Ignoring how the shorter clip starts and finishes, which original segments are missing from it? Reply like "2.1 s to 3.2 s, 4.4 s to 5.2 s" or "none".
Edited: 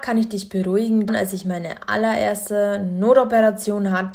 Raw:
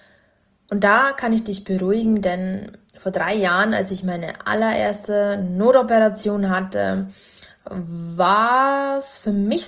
2.2 s to 3.7 s